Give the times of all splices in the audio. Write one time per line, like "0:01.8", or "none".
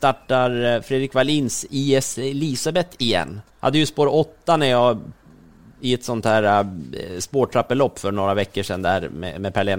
0:03.5